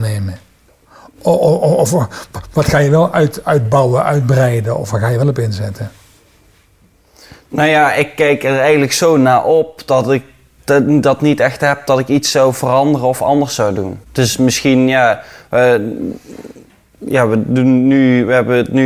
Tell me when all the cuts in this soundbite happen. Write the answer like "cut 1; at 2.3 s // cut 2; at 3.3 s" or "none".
cut 1; at 14.0 s